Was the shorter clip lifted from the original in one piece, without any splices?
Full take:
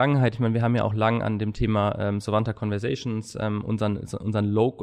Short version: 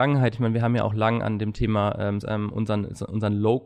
no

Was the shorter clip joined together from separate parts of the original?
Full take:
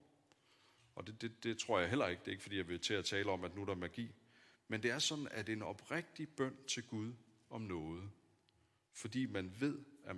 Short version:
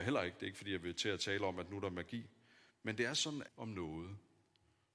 yes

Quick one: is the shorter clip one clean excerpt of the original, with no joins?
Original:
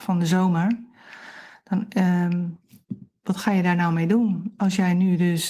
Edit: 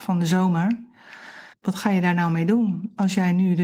no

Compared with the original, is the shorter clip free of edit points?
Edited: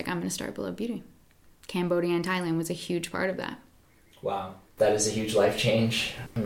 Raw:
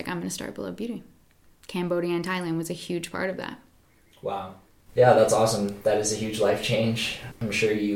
no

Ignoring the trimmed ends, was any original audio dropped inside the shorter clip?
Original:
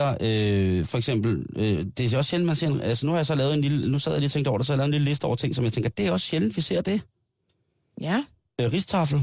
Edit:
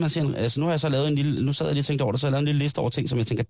no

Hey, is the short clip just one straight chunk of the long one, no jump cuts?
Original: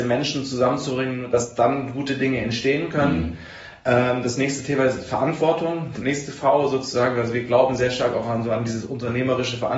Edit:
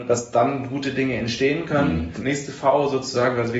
no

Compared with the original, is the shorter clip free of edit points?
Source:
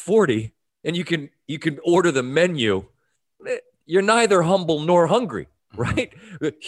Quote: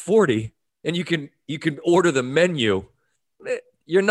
yes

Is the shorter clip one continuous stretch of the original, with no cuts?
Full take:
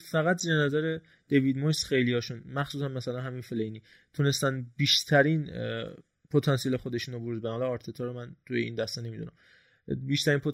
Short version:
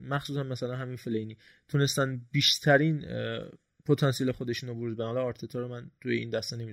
yes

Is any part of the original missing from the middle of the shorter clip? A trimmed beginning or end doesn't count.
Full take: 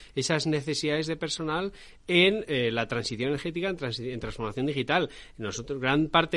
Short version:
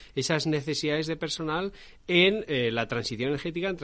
no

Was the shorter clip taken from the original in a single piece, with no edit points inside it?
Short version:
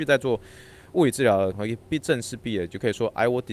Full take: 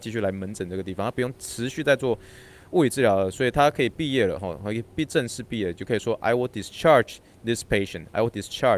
no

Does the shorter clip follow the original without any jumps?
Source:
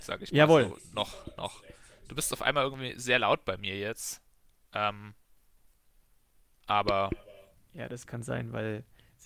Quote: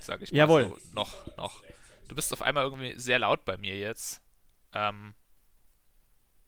yes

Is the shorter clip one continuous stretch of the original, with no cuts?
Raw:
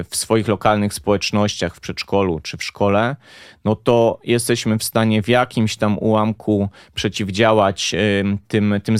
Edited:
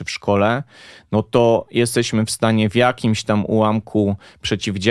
yes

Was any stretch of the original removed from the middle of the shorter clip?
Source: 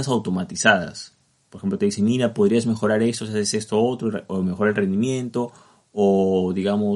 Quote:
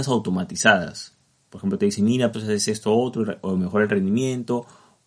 yes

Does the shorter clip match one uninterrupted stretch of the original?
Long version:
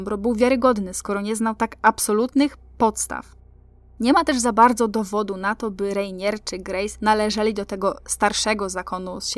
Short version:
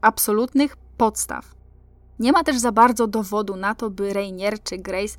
yes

